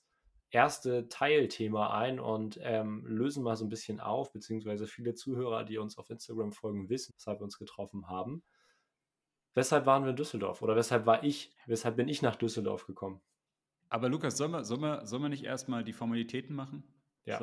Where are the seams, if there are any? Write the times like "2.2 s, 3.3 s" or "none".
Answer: 7.1 s